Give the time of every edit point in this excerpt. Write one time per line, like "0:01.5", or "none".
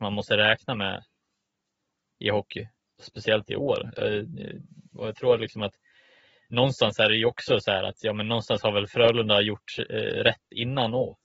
0:02.8